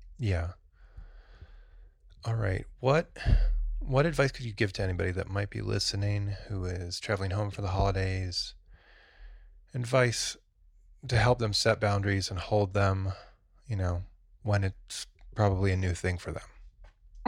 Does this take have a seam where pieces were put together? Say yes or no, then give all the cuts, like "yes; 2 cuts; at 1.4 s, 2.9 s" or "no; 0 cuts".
no; 0 cuts